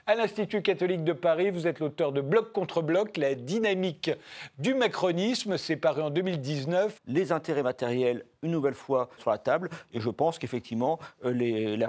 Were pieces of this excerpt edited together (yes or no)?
yes